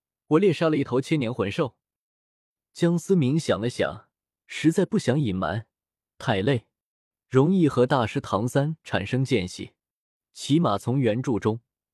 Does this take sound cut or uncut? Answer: uncut